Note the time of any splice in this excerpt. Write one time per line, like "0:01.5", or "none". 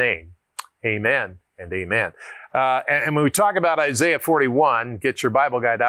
0:02.5